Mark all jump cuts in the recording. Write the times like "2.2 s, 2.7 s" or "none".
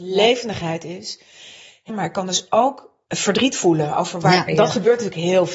1.9 s, 3.1 s, 4.5 s